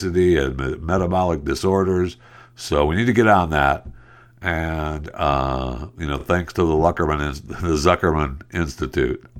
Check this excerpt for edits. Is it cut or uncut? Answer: uncut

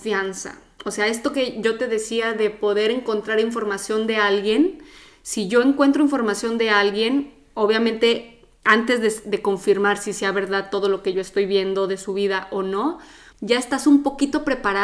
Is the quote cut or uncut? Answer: uncut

